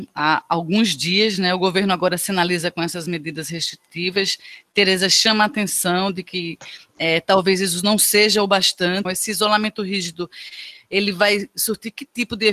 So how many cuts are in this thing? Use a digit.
1